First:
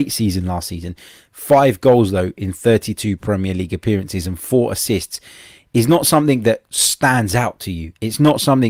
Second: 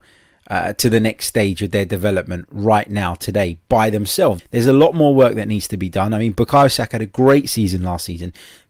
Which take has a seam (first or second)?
second